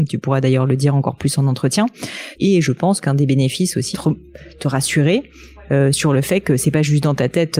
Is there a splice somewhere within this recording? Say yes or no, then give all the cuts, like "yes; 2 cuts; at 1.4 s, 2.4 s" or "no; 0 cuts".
yes; 2 cuts; at 2.3 s, 3.9 s